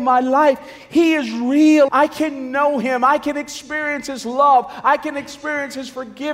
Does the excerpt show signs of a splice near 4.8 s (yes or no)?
no